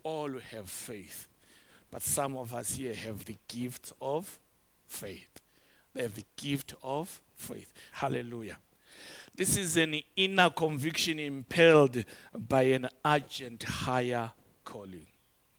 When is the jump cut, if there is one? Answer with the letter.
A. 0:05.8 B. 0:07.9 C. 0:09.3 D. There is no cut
B